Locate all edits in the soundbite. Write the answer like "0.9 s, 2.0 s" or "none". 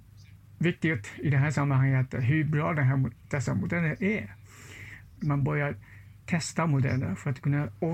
5.2 s